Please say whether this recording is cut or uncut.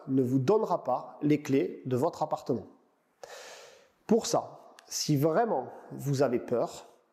uncut